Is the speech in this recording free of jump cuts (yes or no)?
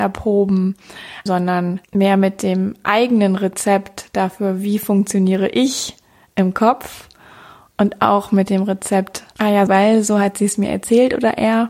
no